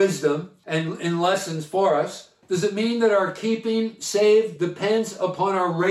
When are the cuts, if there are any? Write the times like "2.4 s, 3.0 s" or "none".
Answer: 2.4 s